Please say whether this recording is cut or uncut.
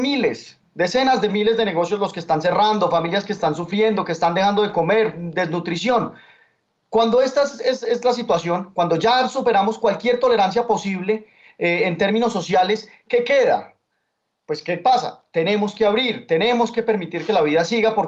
uncut